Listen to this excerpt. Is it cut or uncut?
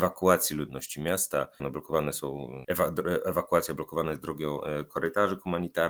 cut